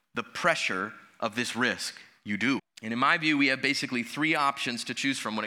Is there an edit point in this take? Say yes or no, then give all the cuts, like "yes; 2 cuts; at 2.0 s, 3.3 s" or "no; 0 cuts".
yes; 1 cut; at 2.6 s